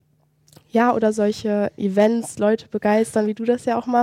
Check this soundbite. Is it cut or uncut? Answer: cut